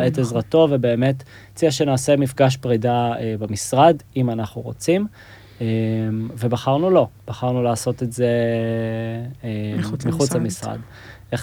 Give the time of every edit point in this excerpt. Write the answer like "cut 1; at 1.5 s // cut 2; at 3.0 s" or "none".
none